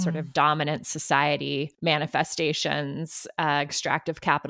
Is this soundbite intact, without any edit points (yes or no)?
no